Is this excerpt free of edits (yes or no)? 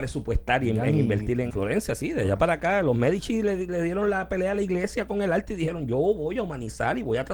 no